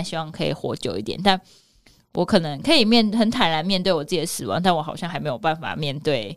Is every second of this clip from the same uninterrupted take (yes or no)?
yes